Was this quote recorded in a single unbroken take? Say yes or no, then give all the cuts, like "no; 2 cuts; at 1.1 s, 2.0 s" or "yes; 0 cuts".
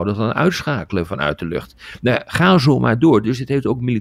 no; 1 cut; at 1.1 s